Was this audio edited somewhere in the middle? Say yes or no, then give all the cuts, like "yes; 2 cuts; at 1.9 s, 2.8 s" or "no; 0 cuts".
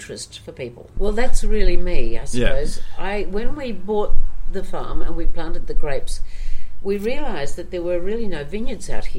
yes; 1 cut; at 1.0 s